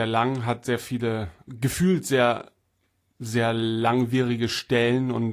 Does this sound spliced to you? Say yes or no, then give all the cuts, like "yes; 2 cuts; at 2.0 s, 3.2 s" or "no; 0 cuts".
no; 0 cuts